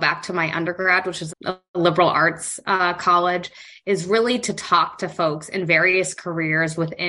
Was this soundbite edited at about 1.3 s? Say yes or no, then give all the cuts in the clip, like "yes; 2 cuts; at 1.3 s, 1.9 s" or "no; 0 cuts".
yes; 1 cut; at 1.3 s